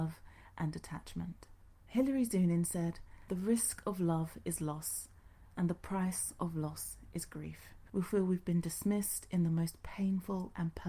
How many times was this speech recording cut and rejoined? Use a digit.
1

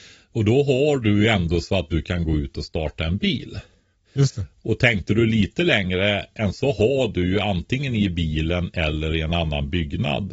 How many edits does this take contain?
1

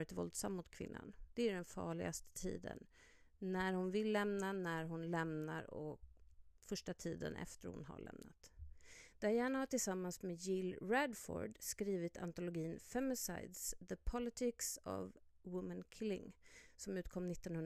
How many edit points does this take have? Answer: 1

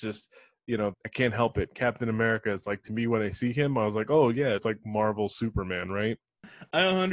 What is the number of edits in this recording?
2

